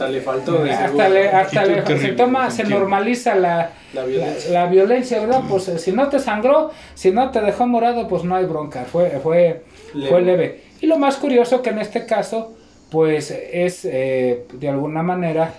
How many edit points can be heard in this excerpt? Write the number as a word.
zero